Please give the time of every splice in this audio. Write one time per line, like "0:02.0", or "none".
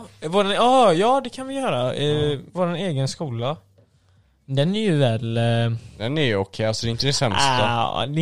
none